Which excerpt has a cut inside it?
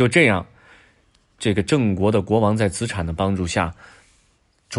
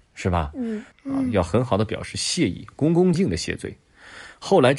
second; 2 cuts; at 0.9 s, 3.1 s

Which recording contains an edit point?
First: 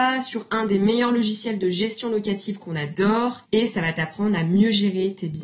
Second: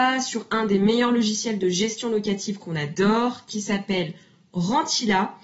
first; 1 cut; at 3.5 s

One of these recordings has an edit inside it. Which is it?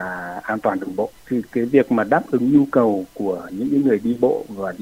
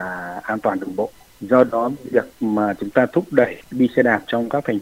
first; 1 cut; at 1.2 s

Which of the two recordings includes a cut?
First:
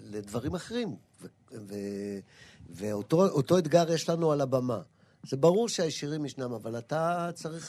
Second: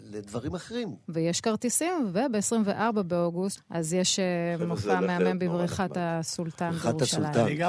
second; 2 cuts; at 1.0 s, 3.6 s

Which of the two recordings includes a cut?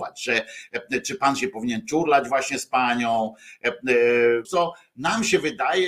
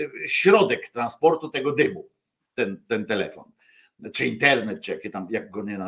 first; 1 cut; at 4.4 s

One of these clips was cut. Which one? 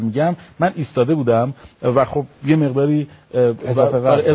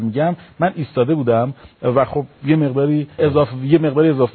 second; 1 cut; at 3.2 s

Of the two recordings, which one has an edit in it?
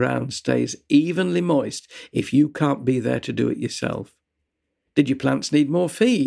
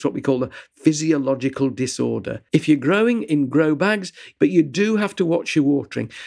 second; 2 cuts; at 2.5 s, 4.4 s

